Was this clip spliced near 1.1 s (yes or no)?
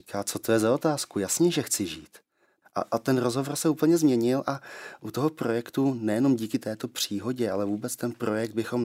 no